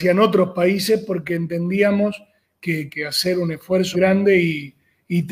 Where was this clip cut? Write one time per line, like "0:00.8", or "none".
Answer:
0:02.9
0:03.9